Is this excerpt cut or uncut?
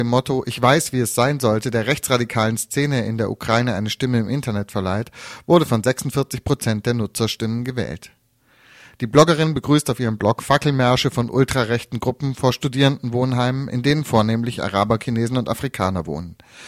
uncut